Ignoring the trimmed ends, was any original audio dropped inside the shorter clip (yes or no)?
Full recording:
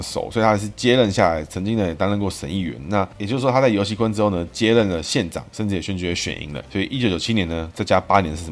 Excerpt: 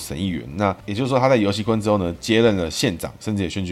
no